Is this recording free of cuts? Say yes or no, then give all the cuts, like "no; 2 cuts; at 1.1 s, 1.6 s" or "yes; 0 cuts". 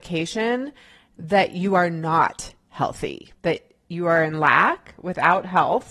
no; 1 cut; at 3.4 s